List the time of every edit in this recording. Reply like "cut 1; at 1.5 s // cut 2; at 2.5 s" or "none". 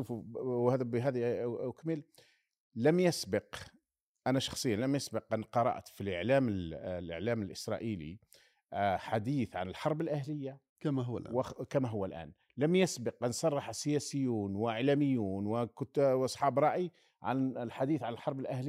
none